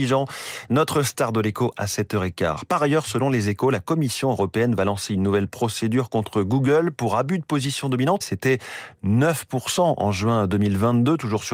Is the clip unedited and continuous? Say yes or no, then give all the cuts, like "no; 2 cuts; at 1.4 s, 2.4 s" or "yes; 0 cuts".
no; 1 cut; at 8.2 s